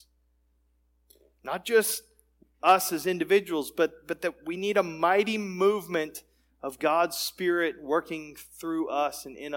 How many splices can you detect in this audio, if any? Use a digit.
0